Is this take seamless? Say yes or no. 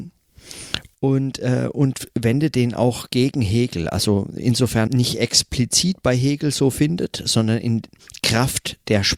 no